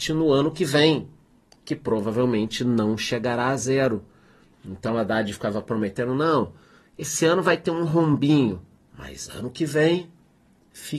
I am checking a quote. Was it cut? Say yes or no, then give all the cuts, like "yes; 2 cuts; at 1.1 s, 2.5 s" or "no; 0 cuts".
no; 0 cuts